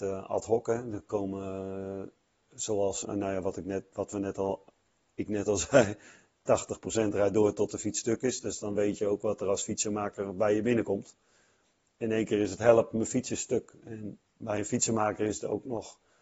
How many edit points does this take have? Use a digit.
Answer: 1